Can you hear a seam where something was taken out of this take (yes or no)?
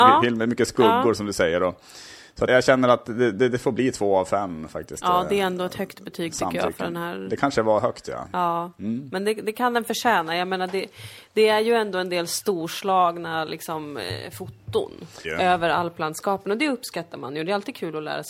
yes